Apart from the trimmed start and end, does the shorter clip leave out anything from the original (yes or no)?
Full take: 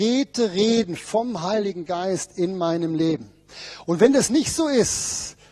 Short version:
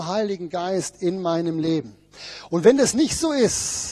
no